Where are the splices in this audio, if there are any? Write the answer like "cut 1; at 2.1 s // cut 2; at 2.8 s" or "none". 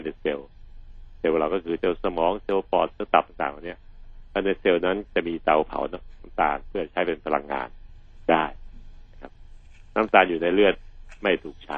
cut 1; at 1.8 s